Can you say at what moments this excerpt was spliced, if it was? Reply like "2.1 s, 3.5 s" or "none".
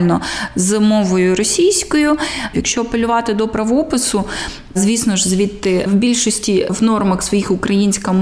2.5 s